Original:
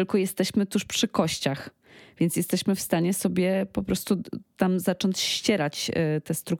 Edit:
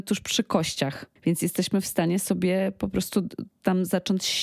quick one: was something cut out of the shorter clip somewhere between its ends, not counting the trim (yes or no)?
yes